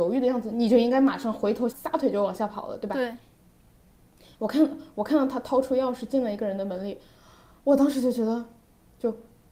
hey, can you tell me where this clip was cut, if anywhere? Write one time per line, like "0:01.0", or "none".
0:01.7